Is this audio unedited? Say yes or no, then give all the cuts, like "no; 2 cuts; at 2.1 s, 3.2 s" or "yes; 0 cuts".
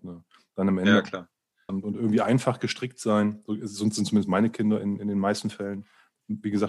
no; 1 cut; at 1.7 s